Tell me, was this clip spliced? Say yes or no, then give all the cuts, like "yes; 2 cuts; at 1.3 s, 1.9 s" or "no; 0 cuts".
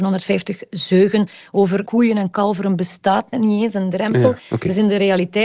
yes; 2 cuts; at 3.3 s, 4.4 s